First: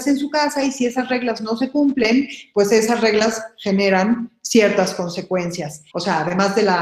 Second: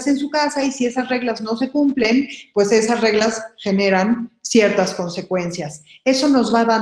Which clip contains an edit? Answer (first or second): first